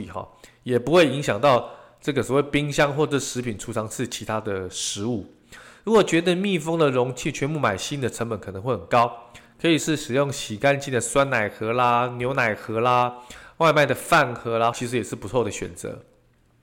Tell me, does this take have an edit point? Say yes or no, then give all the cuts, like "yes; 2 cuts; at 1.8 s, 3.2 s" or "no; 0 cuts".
yes; 2 cuts; at 9.8 s, 14.7 s